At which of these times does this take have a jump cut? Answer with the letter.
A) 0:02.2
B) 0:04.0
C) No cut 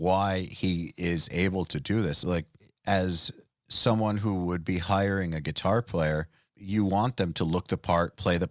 A